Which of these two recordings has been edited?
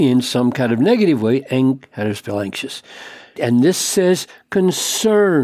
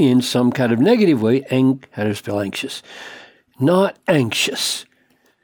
first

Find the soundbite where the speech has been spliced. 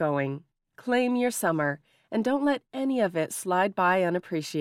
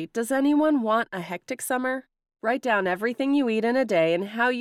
second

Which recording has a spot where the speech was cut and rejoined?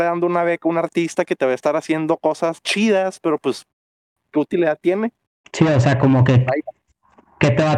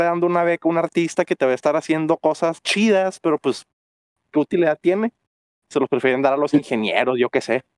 first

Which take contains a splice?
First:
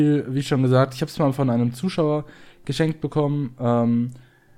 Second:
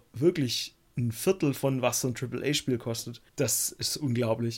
second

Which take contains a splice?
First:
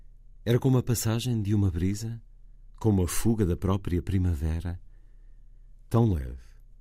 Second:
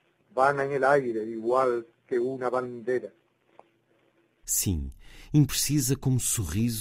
second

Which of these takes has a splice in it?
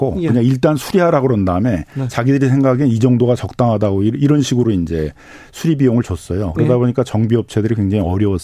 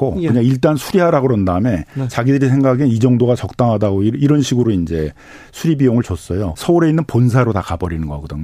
second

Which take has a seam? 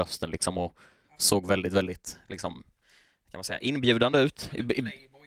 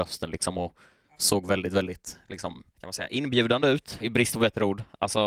second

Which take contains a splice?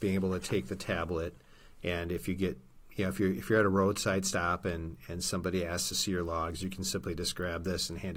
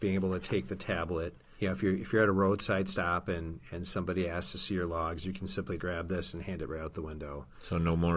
second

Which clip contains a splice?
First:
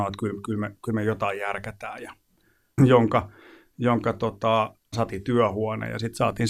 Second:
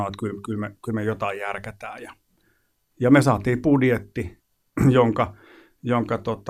first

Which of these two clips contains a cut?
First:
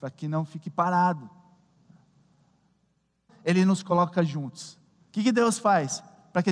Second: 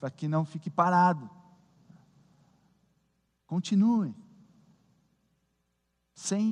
first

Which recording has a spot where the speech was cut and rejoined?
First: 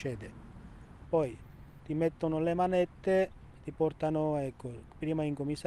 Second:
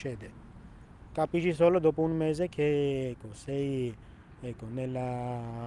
first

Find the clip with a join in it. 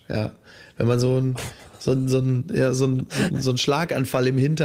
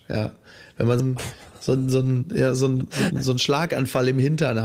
second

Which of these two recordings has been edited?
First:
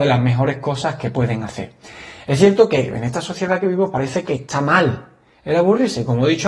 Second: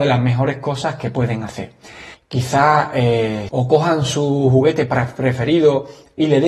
second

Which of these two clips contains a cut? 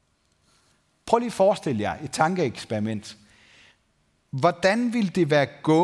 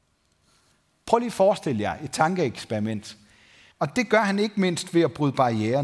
second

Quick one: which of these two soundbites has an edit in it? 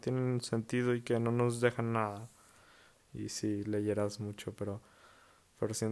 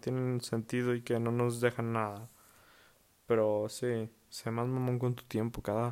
first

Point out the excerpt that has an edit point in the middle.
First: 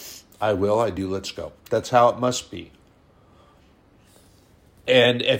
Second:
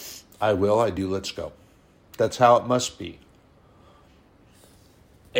first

